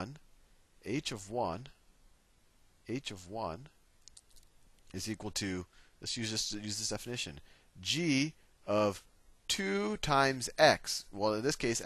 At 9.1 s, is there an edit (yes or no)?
no